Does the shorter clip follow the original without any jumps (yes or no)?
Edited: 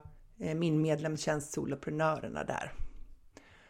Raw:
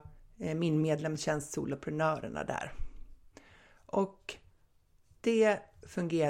yes